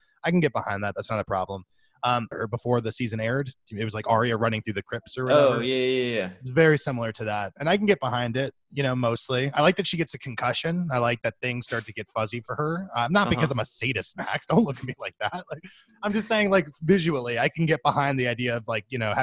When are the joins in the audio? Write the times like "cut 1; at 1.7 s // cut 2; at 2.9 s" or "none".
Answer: cut 1; at 2.3 s